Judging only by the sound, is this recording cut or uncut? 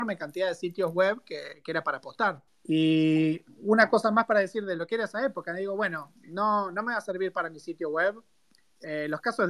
cut